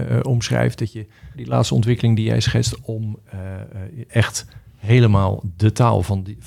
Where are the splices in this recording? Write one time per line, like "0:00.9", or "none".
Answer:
0:01.3
0:04.1